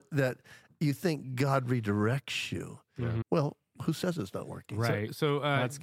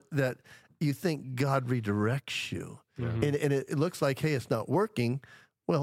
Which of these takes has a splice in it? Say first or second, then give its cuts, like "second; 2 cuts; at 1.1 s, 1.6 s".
first; 1 cut; at 3.2 s